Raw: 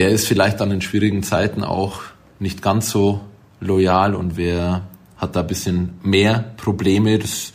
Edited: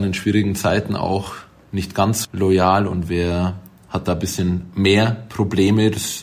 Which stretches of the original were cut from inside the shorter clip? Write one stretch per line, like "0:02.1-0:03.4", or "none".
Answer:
0:02.9-0:03.5